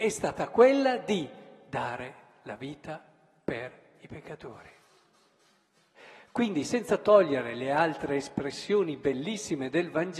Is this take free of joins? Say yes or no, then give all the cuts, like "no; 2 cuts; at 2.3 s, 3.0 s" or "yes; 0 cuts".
yes; 0 cuts